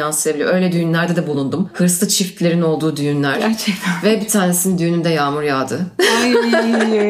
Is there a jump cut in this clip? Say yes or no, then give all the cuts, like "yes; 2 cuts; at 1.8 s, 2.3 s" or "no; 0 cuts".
no; 0 cuts